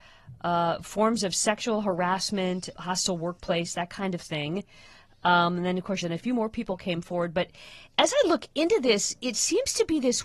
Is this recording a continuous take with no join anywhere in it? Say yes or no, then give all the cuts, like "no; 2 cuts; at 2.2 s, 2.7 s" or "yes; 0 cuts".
no; 2 cuts; at 2.7 s, 6.0 s